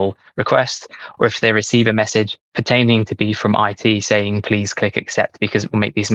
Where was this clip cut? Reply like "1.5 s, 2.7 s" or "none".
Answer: none